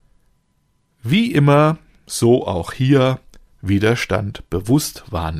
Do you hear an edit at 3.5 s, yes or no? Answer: yes